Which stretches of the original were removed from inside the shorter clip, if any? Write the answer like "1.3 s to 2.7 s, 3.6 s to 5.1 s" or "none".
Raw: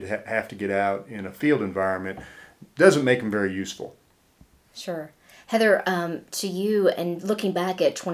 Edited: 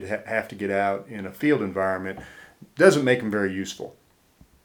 none